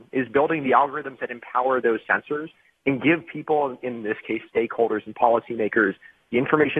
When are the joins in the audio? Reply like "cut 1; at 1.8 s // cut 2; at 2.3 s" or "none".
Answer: cut 1; at 4.5 s